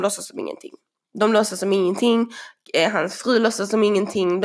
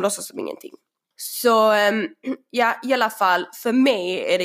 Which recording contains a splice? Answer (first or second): second